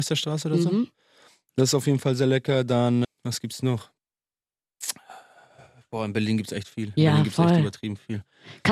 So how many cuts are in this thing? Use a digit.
1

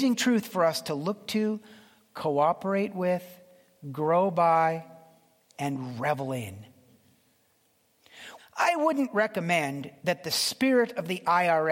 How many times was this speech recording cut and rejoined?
1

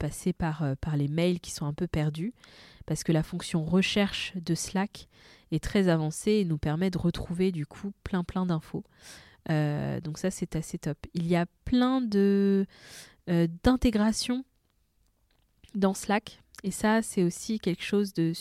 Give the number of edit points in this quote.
0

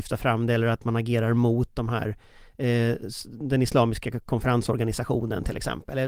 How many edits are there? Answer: 0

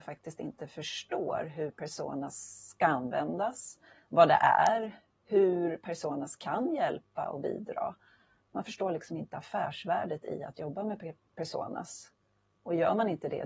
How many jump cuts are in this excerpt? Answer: 0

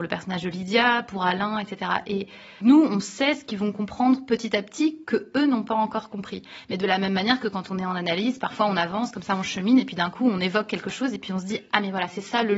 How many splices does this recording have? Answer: 1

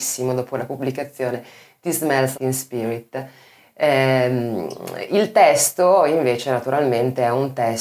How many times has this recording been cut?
1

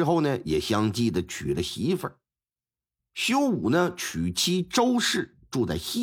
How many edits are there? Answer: 1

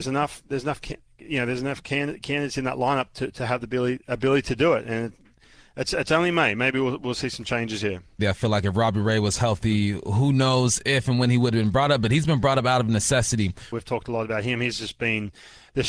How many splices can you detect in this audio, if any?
2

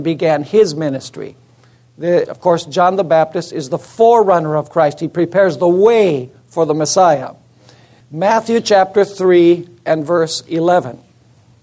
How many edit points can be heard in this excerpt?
2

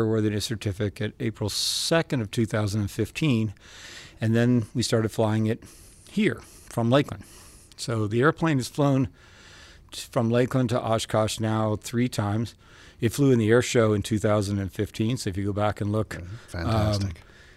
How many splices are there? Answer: 1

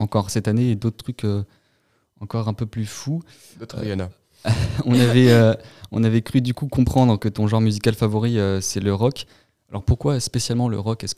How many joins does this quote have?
1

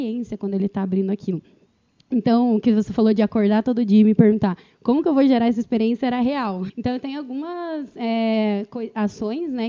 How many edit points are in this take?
1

